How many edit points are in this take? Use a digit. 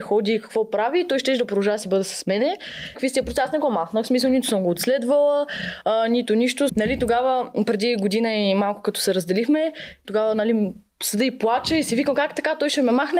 3